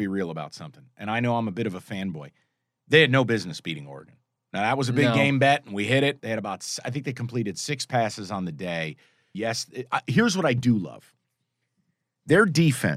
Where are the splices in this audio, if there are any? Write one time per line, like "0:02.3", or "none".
0:06.2
0:09.3

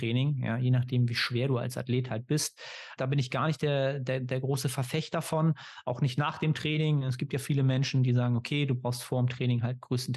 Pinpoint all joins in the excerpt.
0:03.0

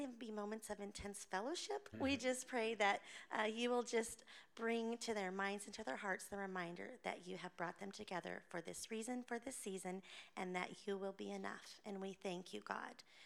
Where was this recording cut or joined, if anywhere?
0:01.9

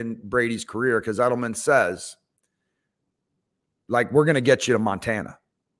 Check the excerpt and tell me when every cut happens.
none

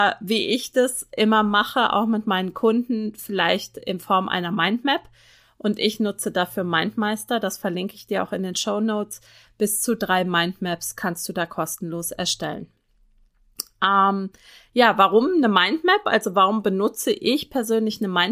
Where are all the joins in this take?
0:09.5

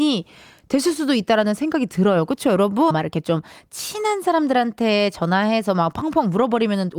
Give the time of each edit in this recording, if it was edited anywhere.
0:02.9

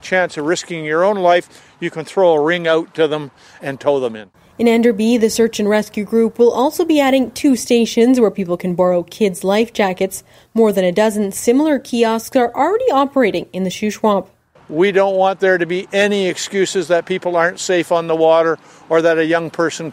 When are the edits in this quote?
0:03.6

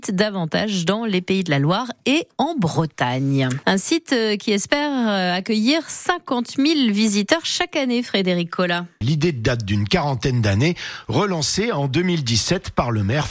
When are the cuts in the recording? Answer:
0:03.6
0:09.0

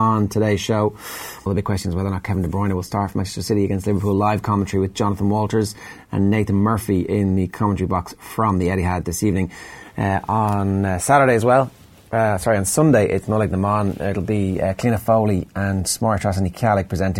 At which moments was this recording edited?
0:01.5

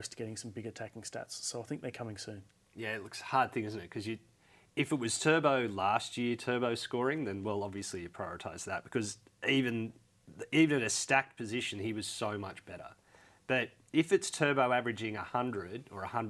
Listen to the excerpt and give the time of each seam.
none

